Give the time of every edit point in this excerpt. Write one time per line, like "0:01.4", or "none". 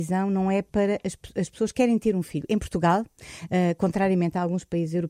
none